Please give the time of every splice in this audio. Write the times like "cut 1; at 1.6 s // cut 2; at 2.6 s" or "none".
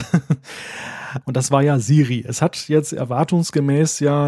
cut 1; at 1.2 s